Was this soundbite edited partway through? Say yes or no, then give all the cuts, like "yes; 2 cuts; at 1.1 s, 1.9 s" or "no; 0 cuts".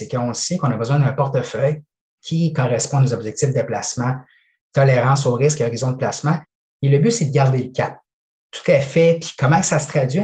yes; 1 cut; at 8.3 s